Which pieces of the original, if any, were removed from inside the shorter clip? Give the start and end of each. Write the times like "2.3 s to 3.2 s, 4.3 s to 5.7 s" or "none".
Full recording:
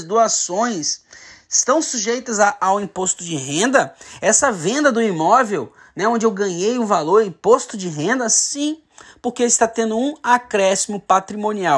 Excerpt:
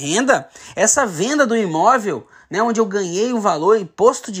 none